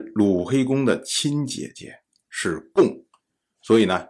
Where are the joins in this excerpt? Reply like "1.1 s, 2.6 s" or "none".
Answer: 2.2 s